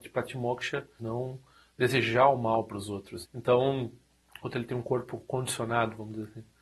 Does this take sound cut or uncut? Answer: cut